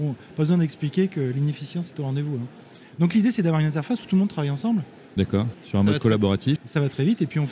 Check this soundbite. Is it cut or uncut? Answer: cut